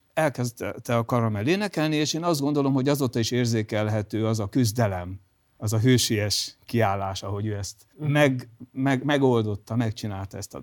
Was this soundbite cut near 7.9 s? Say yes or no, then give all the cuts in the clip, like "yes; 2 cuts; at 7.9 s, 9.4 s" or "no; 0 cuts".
yes; 1 cut; at 7.9 s